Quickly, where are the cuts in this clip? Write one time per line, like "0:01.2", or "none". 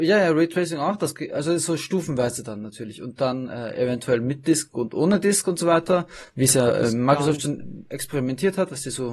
none